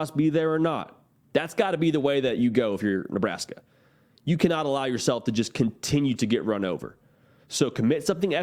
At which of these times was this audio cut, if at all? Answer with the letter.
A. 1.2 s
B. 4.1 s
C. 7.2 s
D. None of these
A